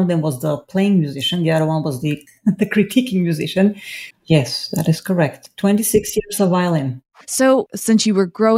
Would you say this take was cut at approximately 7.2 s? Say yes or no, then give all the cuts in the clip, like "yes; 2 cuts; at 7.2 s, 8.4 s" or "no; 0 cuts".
yes; 2 cuts; at 4.1 s, 7.2 s